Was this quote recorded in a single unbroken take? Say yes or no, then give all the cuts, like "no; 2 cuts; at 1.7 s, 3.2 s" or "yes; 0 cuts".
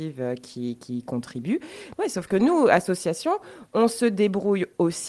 no; 1 cut; at 1.9 s